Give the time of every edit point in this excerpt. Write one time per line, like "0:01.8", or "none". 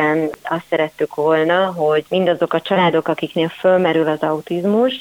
none